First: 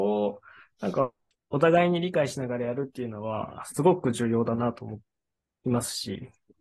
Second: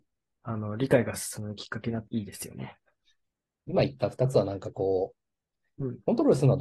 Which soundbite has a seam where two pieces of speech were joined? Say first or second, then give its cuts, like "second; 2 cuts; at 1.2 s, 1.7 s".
second; 1 cut; at 2.1 s